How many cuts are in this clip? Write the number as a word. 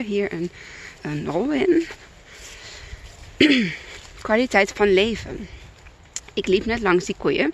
one